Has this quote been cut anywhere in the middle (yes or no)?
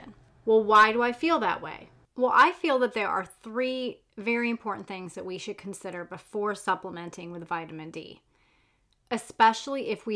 no